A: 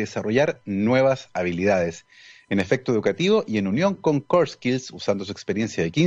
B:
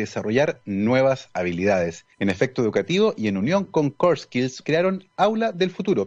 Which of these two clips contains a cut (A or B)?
B